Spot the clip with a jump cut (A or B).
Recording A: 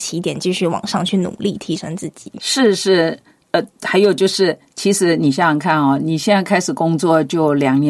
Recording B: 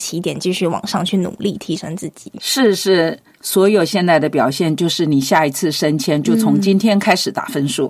B